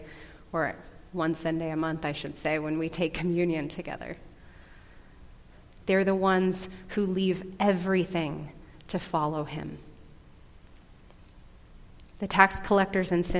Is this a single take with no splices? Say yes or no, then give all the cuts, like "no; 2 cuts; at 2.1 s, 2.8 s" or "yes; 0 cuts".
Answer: no; 1 cut; at 5.8 s